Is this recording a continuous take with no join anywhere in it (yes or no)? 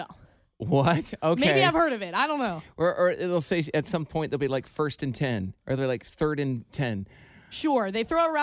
yes